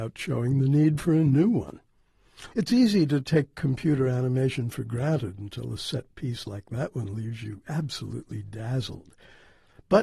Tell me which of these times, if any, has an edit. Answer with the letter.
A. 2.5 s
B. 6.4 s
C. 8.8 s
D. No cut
A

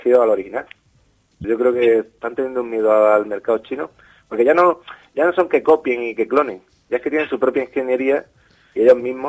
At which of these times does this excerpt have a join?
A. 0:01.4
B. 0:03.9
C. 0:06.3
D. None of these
A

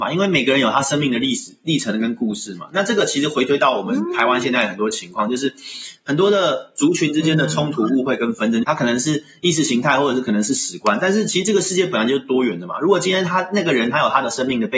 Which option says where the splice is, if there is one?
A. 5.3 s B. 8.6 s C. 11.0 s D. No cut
B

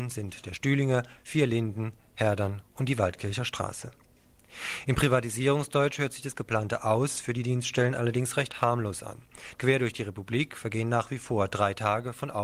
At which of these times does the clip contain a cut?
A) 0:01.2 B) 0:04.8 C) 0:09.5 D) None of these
C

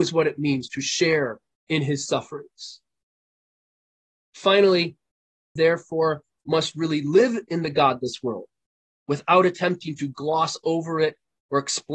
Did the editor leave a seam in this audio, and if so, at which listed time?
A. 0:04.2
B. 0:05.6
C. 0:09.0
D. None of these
B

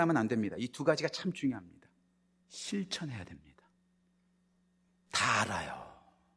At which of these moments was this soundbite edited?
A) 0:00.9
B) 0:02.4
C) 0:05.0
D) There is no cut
B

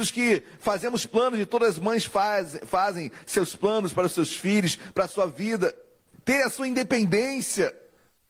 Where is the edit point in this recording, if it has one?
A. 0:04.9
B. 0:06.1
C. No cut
B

